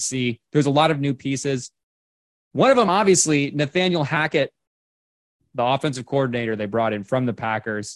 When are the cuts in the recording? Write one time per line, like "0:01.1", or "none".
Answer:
none